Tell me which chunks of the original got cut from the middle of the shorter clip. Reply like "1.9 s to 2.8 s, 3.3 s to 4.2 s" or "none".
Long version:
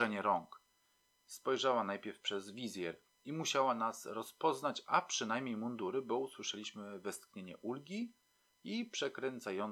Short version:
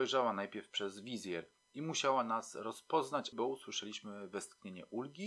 4.8 s to 6.0 s

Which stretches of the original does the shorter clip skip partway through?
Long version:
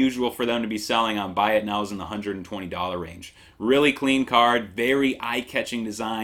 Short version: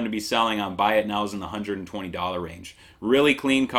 none

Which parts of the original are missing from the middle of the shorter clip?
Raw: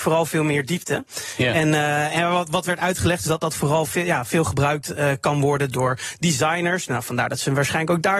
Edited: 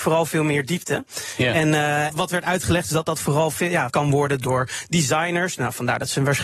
2.1 s to 2.4 s, 4.2 s to 5.2 s

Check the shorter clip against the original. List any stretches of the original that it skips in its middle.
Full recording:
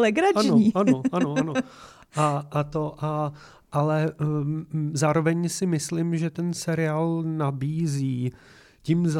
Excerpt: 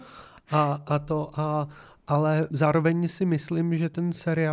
4.2 s to 4.9 s

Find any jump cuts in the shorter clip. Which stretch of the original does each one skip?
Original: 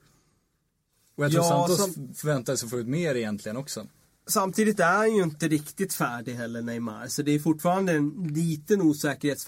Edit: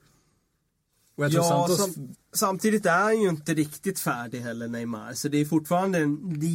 2.1 s to 4.1 s

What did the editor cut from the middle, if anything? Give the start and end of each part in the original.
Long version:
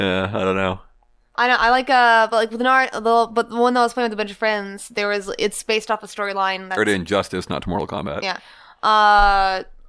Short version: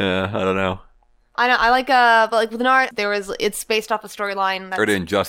2.9 s to 4.9 s

